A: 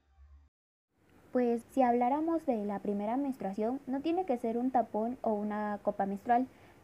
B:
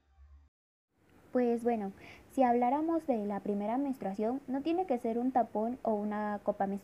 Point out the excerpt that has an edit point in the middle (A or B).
A